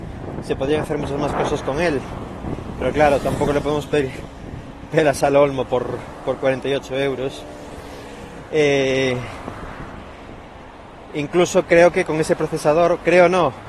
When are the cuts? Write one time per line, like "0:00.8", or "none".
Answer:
none